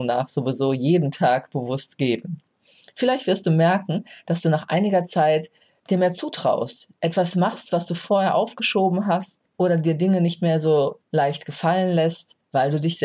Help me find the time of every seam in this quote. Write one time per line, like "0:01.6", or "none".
none

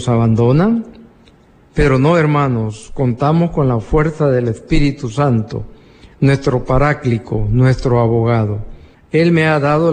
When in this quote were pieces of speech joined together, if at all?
0:08.9

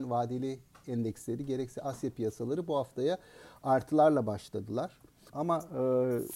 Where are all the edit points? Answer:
0:05.3

